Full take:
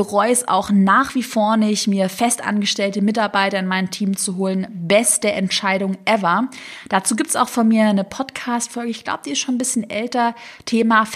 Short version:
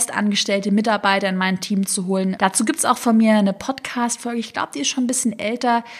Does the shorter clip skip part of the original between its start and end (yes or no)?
yes